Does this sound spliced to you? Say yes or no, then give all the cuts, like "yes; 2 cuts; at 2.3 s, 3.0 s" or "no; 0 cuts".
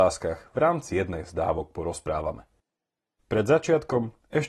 yes; 1 cut; at 3.2 s